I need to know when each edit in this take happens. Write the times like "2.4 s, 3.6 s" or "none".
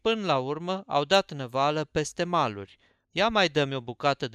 3.0 s